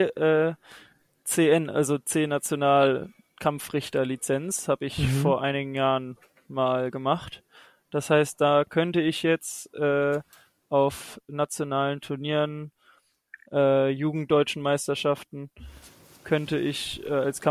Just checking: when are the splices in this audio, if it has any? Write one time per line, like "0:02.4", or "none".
none